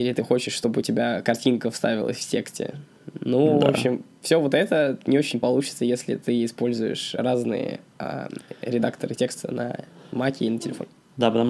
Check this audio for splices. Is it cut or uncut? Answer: uncut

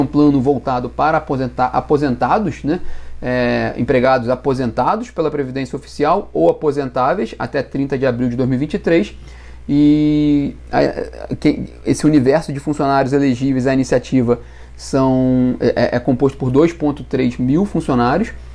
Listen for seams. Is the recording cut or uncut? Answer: uncut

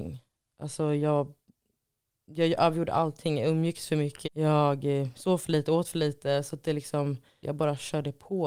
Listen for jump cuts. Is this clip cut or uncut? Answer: cut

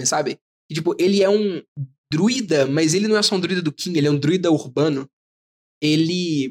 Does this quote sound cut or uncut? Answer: uncut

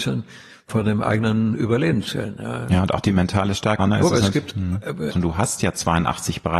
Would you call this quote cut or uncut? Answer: cut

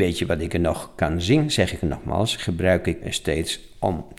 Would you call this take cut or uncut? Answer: cut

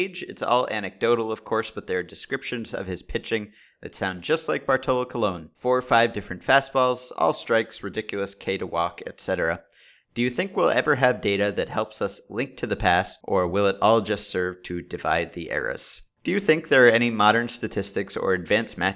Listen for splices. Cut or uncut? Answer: cut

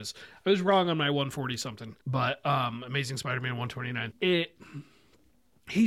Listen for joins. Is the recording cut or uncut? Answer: cut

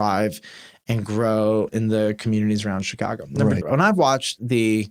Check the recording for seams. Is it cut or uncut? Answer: cut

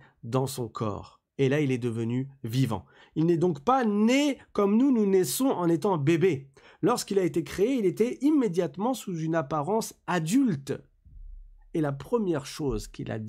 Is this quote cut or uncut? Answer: cut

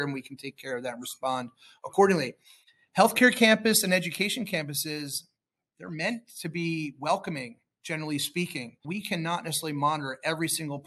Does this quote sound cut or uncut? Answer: cut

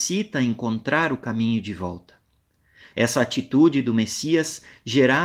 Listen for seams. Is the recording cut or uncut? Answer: cut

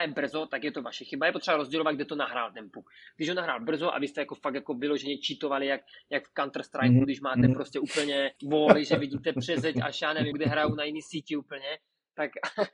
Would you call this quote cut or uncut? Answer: cut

